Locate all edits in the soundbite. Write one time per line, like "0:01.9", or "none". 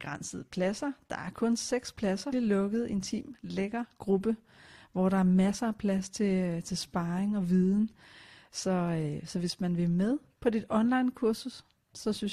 0:02.3